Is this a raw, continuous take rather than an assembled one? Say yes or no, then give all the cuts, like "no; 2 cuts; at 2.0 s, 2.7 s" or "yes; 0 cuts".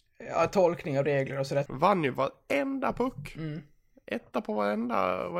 no; 1 cut; at 1.6 s